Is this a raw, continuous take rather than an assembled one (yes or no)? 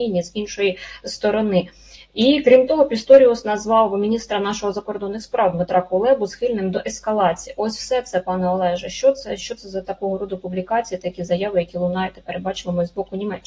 yes